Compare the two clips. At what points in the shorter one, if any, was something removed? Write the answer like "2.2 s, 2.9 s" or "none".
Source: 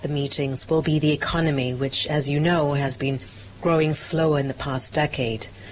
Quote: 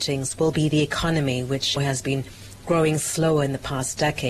1.8 s